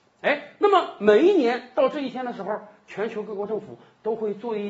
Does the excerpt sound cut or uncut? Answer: uncut